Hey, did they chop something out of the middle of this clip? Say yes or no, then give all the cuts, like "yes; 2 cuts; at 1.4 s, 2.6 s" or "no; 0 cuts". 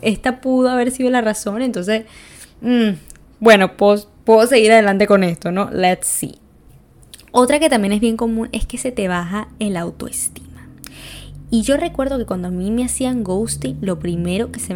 no; 0 cuts